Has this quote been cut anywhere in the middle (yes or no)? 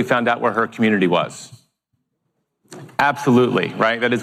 no